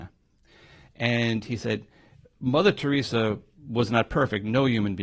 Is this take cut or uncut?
uncut